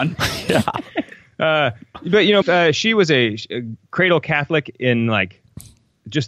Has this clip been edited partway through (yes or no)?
yes